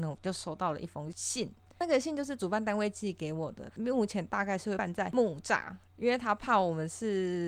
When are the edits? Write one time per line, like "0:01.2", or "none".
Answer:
0:03.7
0:05.9